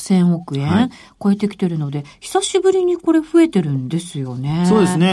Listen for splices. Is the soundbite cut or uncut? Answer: uncut